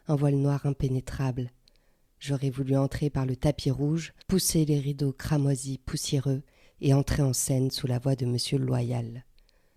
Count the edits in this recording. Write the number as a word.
one